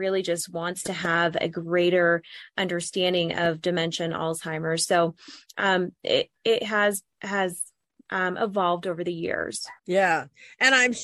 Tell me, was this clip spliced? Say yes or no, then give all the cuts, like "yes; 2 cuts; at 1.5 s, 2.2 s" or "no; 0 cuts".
yes; 1 cut; at 9.8 s